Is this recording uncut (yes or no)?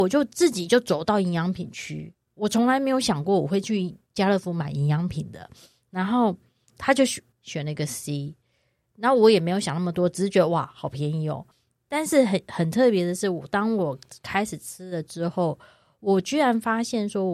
no